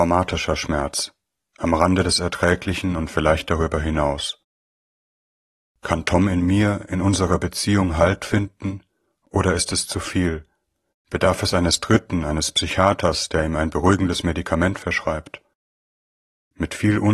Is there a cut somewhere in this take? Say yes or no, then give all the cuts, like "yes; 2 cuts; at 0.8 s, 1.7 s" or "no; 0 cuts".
no; 0 cuts